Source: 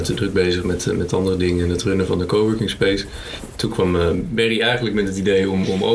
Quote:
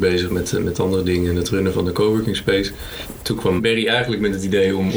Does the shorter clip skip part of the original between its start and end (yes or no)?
yes